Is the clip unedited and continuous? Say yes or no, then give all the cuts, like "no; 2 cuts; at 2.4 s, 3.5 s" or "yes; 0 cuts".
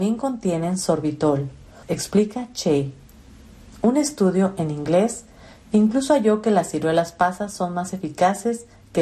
no; 1 cut; at 1.8 s